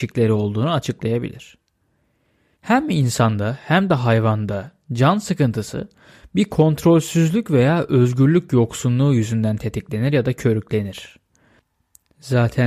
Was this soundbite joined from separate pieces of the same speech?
yes; 1 cut; at 2.6 s

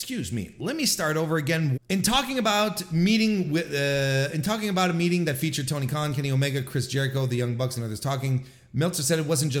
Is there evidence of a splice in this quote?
yes; 1 cut; at 1.8 s

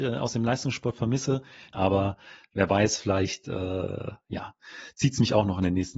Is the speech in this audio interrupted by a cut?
yes; 1 cut; at 1.7 s

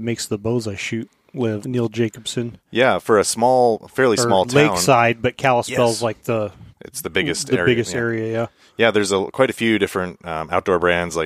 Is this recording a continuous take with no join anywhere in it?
no; 2 cuts; at 1.6 s, 6.7 s

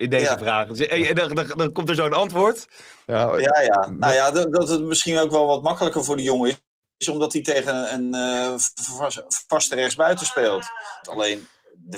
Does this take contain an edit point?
yes; 2 cuts; at 3.1 s, 11.0 s

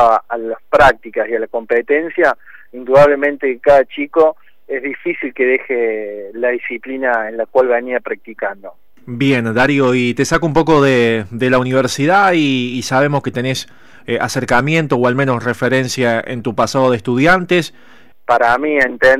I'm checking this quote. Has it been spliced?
yes; 2 cuts; at 9.0 s, 18.1 s

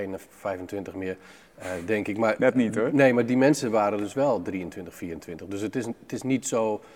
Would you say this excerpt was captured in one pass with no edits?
yes; 0 cuts

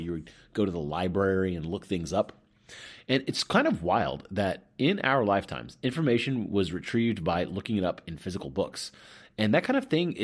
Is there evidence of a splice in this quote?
no; 0 cuts

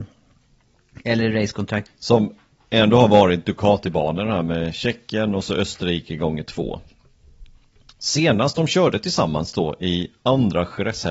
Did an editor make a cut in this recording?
yes; 1 cut; at 1.9 s

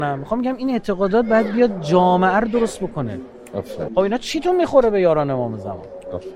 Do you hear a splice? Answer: yes; 1 cut; at 3.9 s

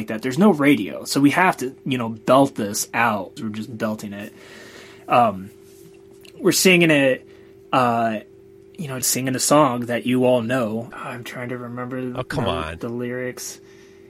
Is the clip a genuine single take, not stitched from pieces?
no; 3 cuts; at 3.4 s, 9.0 s, 10.9 s

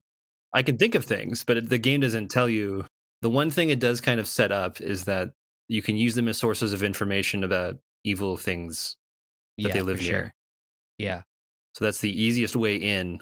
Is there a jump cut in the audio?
yes; 1 cut; at 12.1 s

